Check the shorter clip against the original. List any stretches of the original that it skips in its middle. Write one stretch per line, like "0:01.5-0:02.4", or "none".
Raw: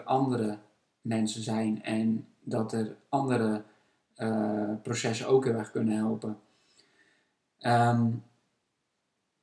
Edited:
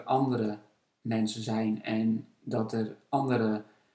none

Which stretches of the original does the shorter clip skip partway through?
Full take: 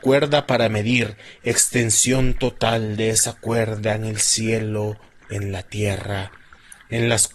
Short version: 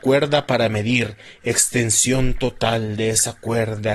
none

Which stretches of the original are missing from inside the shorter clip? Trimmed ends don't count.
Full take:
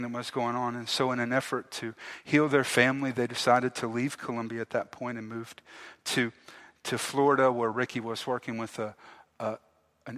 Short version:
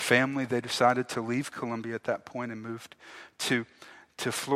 none

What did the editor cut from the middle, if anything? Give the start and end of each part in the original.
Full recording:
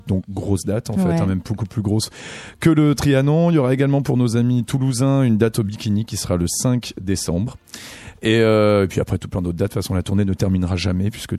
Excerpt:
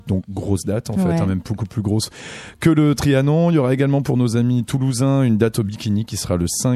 none

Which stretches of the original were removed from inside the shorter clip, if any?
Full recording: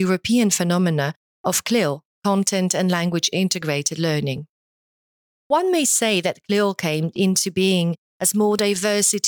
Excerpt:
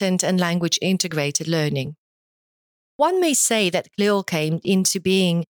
none

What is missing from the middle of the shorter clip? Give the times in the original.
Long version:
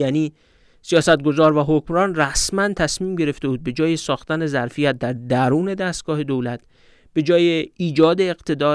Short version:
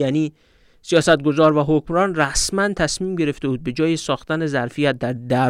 none

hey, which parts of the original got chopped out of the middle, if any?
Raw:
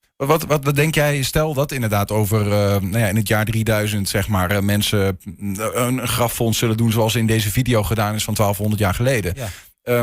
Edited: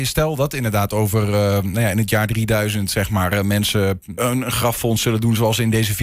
0:05.4-0:05.7

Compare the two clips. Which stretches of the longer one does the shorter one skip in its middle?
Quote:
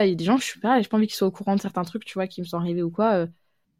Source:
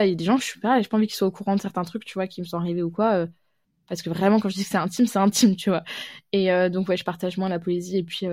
none

